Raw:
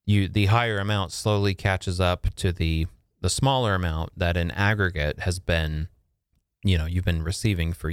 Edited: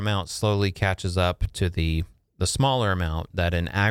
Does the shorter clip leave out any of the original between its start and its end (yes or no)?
no